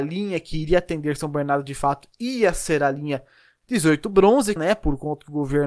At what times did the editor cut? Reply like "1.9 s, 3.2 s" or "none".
4.6 s